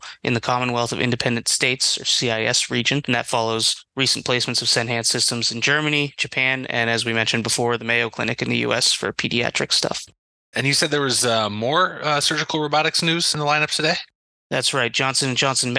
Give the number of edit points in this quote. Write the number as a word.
one